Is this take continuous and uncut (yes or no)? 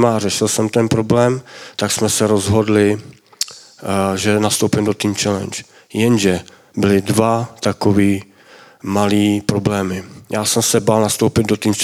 yes